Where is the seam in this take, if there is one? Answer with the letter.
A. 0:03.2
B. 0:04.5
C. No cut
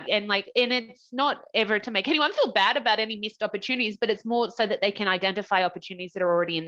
C